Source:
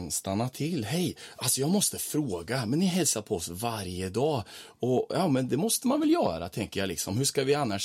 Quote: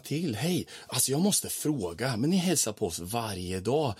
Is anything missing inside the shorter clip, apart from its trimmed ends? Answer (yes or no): no